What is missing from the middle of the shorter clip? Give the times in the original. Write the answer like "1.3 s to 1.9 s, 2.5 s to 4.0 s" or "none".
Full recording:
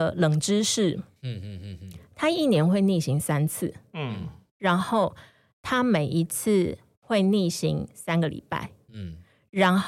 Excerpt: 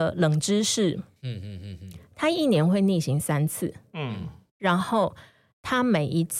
none

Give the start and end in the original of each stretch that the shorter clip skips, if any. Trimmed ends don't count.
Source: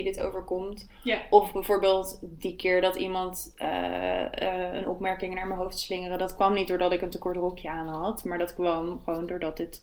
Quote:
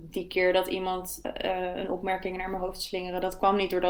3.5 s to 4.2 s

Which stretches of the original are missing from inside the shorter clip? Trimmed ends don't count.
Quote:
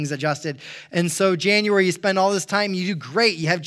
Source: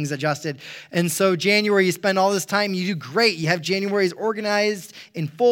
none

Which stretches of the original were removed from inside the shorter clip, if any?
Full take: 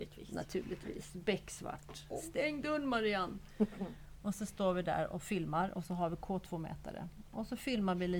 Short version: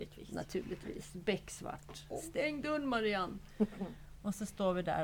none

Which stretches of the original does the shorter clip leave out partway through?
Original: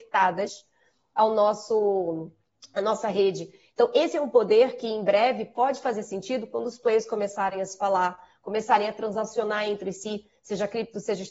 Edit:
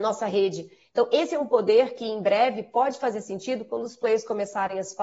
none

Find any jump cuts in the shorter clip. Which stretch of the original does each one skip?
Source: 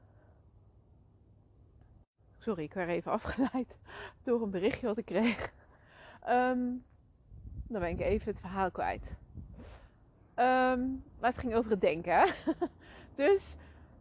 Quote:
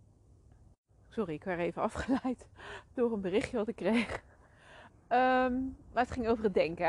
6.2 s to 10.2 s

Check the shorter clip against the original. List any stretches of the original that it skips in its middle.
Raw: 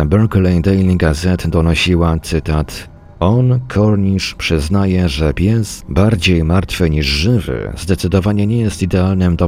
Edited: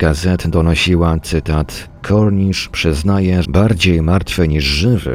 3.0 s to 3.7 s, 5.1 s to 5.9 s

